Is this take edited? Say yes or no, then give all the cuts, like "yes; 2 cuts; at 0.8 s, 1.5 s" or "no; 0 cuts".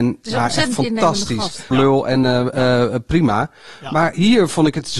yes; 1 cut; at 1.7 s